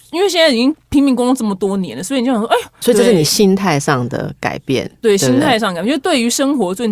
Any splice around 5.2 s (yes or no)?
no